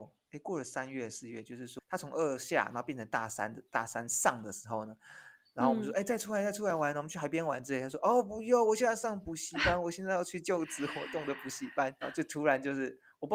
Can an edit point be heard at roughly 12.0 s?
yes; 1 cut; at 12.0 s

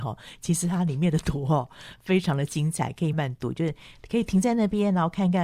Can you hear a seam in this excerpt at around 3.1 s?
yes; 1 cut; at 3.1 s

